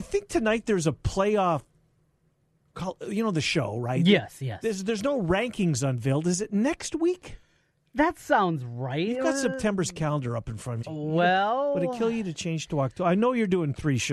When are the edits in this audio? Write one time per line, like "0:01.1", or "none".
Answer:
0:10.8

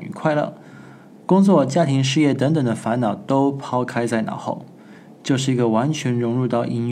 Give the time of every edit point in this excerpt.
none

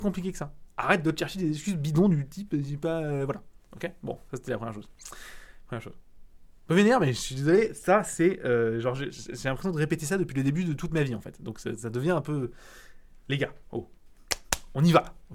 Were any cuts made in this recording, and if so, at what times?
none

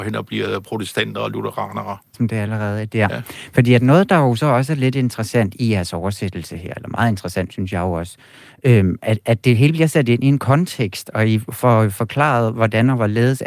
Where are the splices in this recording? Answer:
0:02.1

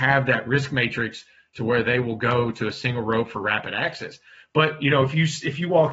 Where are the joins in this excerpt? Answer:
none

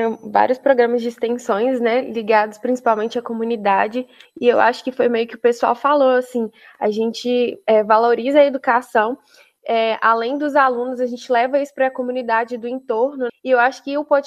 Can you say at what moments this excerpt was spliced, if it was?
0:13.3

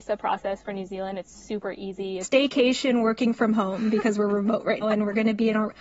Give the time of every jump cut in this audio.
0:02.2
0:04.8

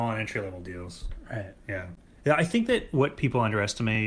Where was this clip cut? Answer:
none

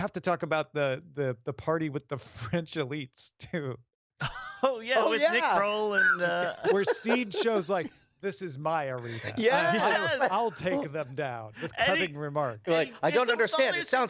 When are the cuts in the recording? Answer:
none

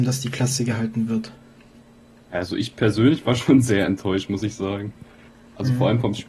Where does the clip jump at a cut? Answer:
none

